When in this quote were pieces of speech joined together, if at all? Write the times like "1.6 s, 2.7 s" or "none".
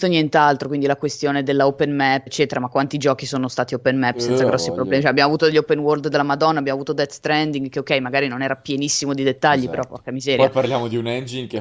2.3 s